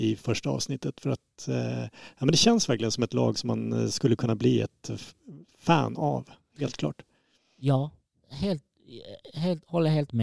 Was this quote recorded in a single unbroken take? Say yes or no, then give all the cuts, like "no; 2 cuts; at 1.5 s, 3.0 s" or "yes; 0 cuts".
no; 1 cut; at 9.3 s